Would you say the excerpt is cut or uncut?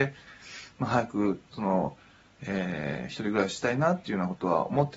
uncut